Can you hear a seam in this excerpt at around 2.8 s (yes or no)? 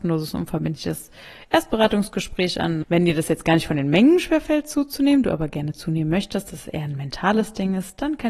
yes